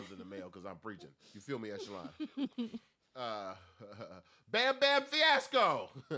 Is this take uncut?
yes; 0 cuts

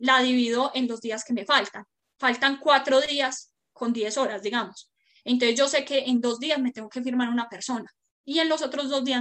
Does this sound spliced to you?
no; 0 cuts

